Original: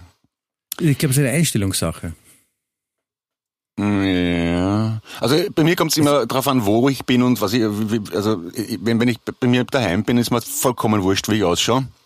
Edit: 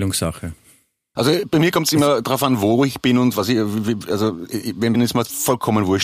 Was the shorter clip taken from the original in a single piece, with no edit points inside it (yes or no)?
no